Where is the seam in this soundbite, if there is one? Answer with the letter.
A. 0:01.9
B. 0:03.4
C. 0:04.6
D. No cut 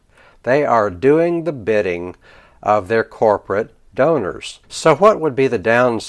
C